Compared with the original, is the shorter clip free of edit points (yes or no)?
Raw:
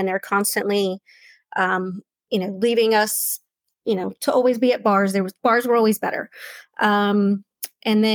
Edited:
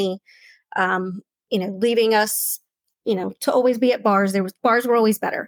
yes